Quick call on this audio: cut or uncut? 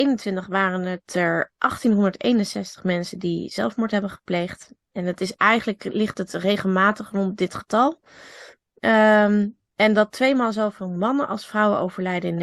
uncut